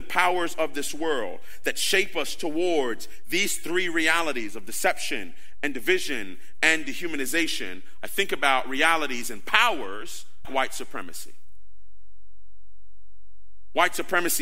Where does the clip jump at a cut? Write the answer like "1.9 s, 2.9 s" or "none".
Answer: 10.4 s

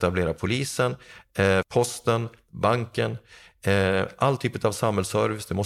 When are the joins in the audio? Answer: 1.6 s

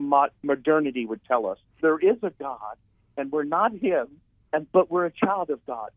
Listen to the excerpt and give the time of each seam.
1.8 s

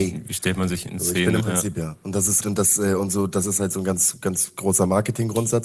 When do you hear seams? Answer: 1.4 s, 2.4 s

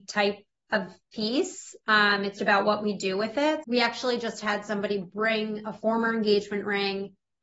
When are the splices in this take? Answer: 2.4 s, 3.6 s

